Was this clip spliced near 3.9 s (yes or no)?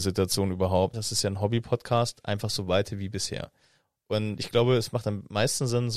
no